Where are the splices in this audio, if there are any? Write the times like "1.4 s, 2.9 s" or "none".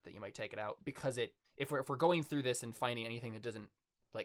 1.4 s